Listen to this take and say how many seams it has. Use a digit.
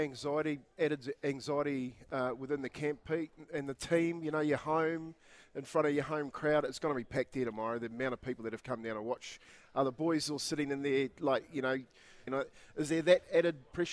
1